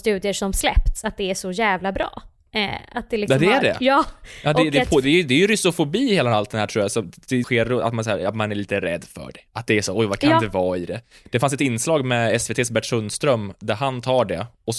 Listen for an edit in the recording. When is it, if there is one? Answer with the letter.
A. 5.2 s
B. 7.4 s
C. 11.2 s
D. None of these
B